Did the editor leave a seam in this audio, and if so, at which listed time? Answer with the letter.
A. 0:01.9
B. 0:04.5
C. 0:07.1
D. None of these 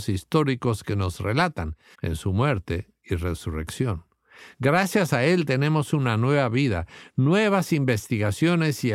A